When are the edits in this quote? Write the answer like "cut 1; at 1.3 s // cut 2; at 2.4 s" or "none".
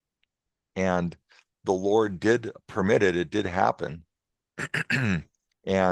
none